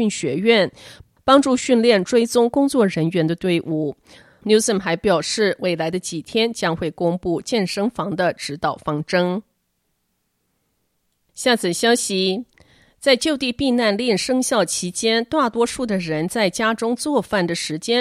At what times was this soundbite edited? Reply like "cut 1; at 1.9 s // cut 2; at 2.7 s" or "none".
none